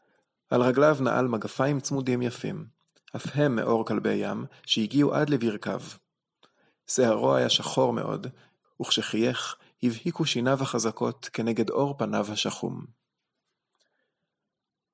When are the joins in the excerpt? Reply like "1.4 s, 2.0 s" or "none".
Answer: 8.6 s